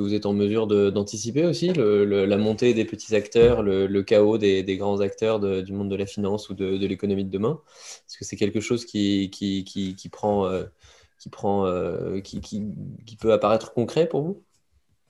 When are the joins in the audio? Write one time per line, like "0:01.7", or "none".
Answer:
none